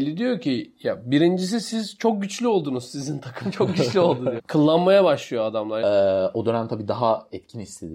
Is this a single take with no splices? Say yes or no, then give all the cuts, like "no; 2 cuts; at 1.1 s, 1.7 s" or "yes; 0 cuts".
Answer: no; 2 cuts; at 4.4 s, 5.8 s